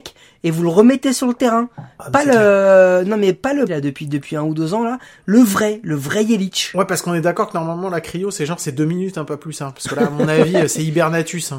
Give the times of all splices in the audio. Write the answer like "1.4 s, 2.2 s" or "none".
3.7 s